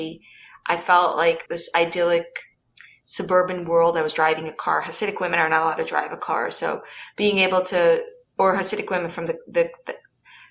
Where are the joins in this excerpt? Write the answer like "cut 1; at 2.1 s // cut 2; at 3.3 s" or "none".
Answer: cut 1; at 1.5 s